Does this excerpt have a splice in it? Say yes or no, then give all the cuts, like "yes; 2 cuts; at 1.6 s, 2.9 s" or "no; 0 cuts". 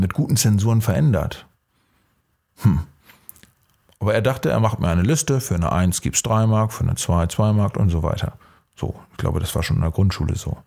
no; 0 cuts